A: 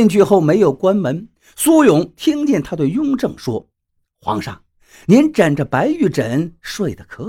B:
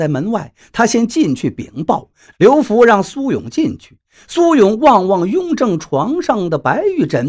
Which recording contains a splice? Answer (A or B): B